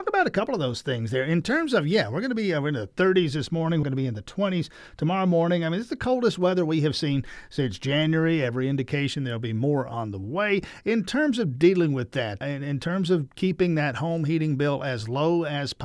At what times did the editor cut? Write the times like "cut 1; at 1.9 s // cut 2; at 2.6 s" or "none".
cut 1; at 3.8 s // cut 2; at 12.4 s